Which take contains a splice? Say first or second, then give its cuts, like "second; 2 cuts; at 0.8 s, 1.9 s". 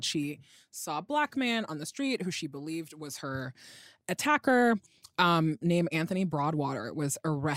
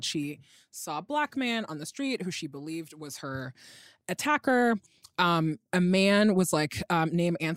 first; 1 cut; at 5.6 s